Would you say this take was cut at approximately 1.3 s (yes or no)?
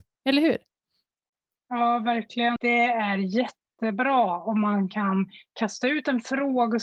no